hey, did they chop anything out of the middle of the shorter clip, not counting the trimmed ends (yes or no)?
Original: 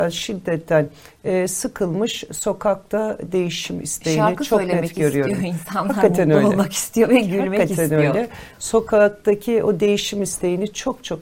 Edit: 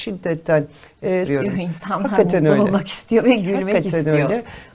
yes